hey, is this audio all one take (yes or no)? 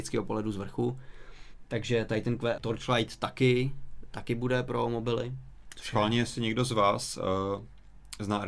no